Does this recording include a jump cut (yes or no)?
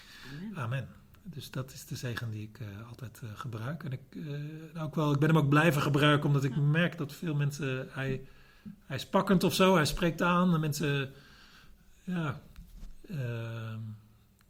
no